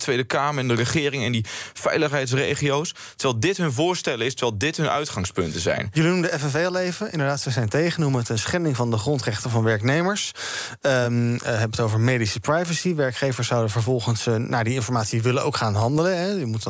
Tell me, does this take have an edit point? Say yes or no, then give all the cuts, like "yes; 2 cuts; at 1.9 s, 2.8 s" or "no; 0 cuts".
no; 0 cuts